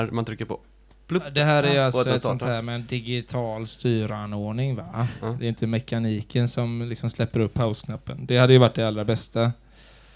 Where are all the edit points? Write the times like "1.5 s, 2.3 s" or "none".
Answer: none